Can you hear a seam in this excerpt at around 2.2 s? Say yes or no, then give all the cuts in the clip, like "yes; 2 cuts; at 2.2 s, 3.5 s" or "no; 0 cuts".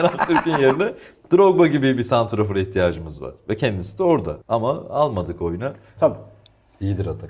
no; 2 cuts; at 4.4 s, 6.0 s